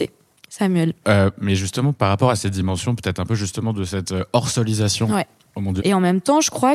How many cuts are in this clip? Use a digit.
2